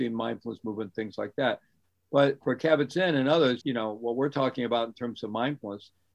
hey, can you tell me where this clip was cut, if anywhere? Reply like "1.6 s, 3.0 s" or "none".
3.6 s